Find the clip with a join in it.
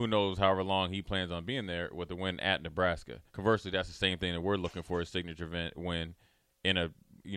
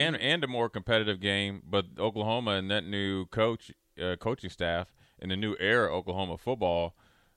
first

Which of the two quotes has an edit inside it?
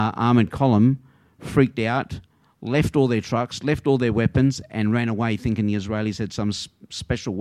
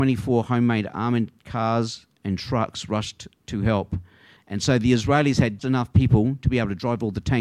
second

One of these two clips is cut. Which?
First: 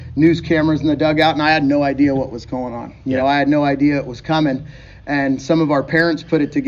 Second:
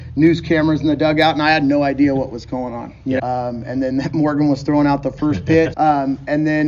second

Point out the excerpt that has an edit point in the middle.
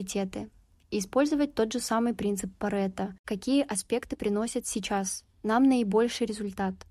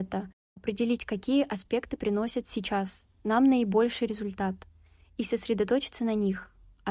first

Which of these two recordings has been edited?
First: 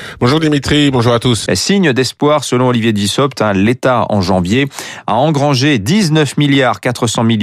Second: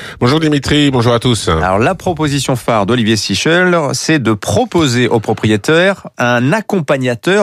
first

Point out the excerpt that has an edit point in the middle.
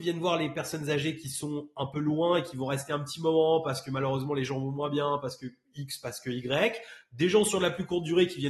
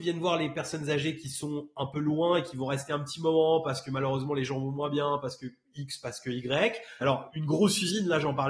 second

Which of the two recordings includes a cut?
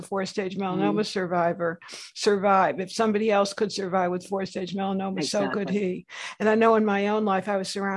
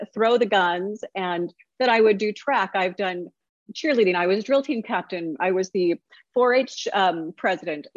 first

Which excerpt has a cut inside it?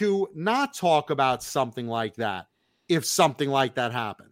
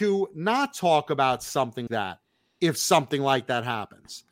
second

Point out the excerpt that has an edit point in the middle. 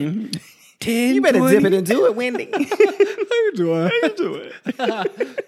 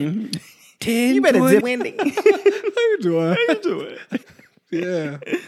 second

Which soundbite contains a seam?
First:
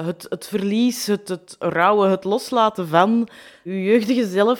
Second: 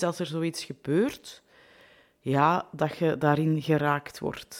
first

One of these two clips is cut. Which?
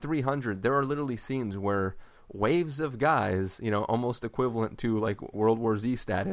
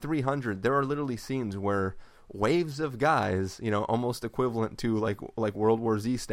first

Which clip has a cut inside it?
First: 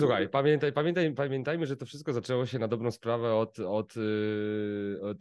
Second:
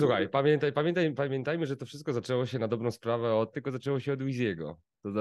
second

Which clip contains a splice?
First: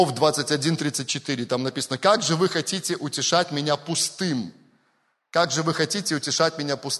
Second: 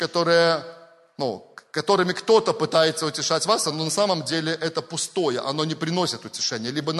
second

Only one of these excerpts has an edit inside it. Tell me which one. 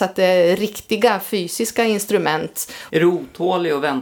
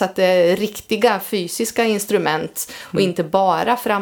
first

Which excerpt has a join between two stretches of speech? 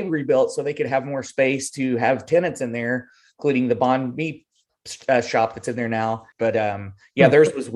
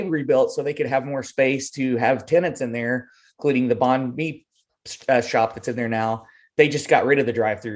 first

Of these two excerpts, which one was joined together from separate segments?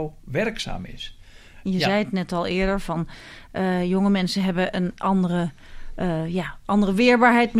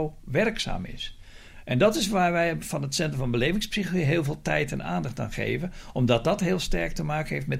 first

